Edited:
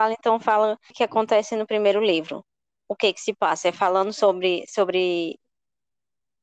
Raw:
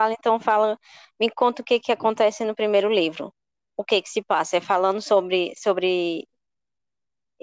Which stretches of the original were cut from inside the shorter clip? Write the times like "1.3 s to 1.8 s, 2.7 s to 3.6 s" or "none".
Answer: 0.9 s to 1.8 s